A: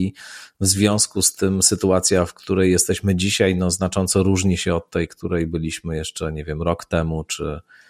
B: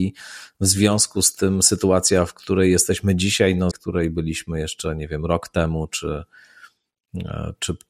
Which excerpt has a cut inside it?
B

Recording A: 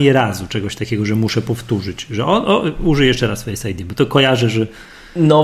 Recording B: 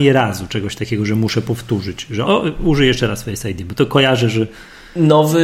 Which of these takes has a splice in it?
B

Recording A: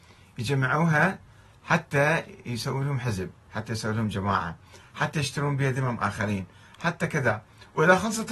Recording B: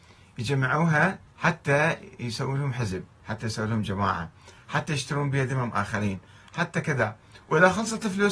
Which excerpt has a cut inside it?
B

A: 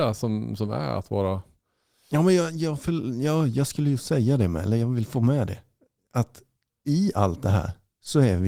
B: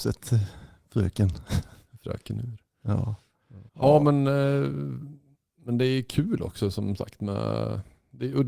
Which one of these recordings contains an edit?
B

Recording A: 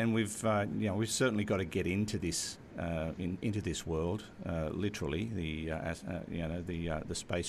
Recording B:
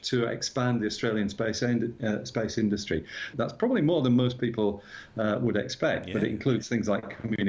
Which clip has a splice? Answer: B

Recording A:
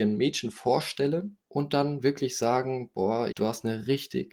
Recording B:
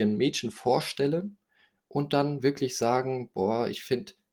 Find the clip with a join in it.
A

